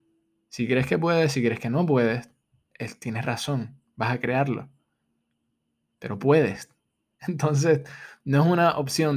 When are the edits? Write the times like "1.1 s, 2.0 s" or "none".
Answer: 7.2 s

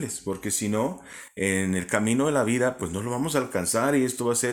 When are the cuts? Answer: none

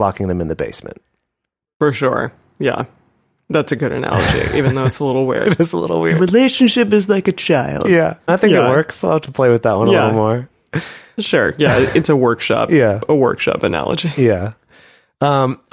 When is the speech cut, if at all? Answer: 8.3 s

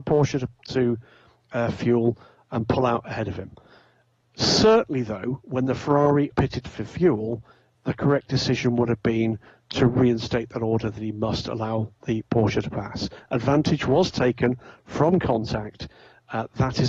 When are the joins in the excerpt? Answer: 6.3 s, 7.7 s

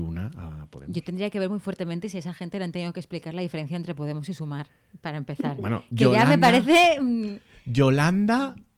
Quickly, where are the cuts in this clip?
none

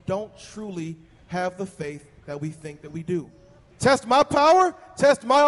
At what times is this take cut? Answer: 3.7 s

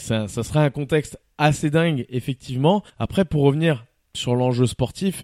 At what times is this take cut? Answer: 2.9 s

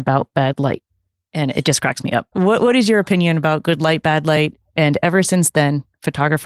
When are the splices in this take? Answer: 2.3 s, 4.6 s

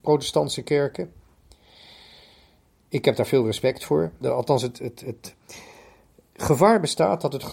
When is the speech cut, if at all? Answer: 4.2 s, 6.3 s

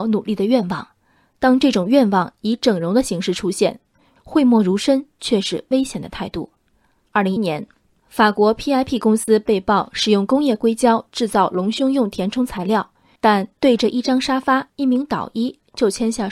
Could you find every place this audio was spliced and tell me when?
7.4 s, 13.2 s, 14.7 s

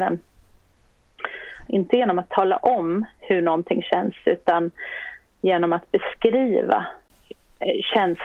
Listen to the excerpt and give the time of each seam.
1.7 s

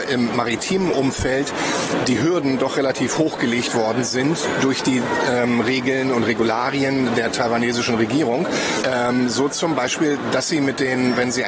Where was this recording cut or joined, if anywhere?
8.8 s

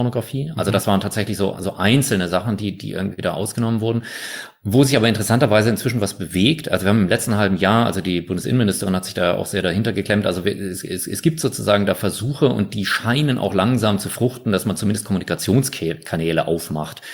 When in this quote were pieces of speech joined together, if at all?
none

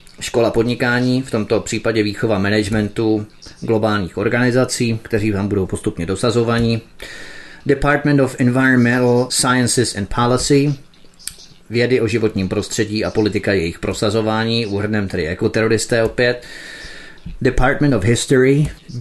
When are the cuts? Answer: none

